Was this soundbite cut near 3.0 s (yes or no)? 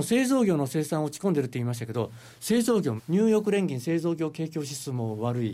yes